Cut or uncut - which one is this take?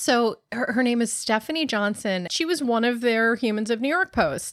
cut